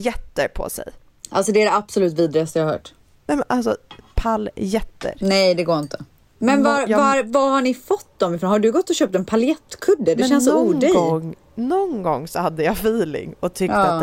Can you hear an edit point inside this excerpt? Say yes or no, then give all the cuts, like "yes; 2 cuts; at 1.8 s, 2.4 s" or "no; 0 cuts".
yes; 1 cut; at 6.3 s